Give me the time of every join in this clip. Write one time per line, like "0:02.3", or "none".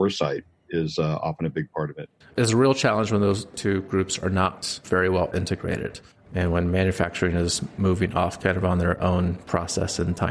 0:02.2